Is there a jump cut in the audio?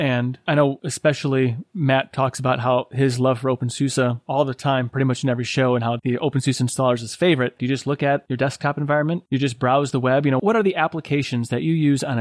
yes; 1 cut; at 7.6 s

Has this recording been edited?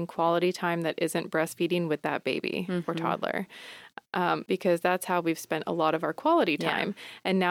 yes; 1 cut; at 4.5 s

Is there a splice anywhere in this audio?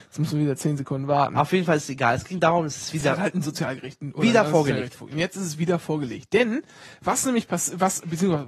no; 0 cuts

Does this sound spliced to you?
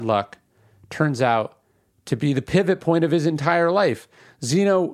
no; 0 cuts

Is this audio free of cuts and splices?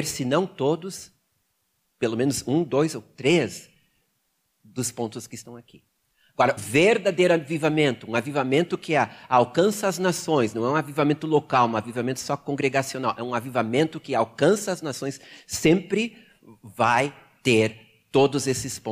no; 1 cut; at 6.6 s

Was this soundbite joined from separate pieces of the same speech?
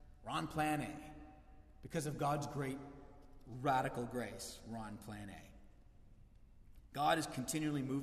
no; 0 cuts

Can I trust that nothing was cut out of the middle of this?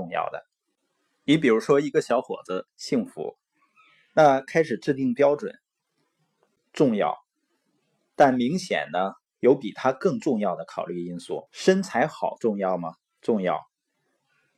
no; 3 cuts; at 2.7 s, 6.6 s, 11.5 s

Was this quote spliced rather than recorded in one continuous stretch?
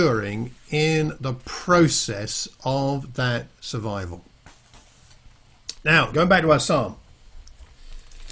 no; 0 cuts

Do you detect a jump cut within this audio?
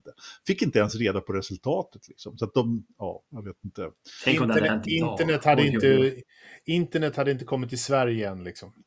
no; 0 cuts

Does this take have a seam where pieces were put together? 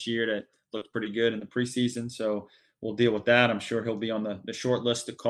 no; 0 cuts

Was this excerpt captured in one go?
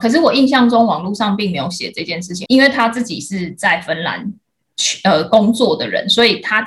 no; 1 cut; at 2.5 s

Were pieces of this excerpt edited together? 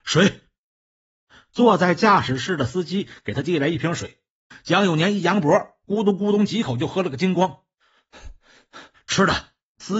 no; 0 cuts

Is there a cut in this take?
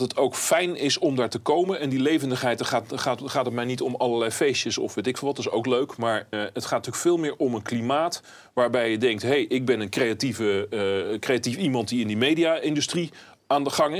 yes; 1 cut; at 6.3 s

